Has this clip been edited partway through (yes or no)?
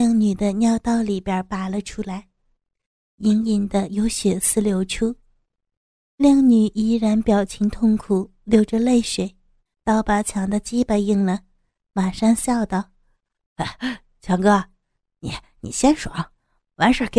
yes